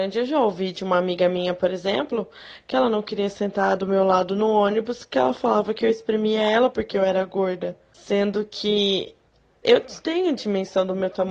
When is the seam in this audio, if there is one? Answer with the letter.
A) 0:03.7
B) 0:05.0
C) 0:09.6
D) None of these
C